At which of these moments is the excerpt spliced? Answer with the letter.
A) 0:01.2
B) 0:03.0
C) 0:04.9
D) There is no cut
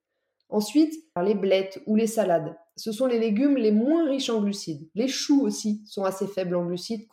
A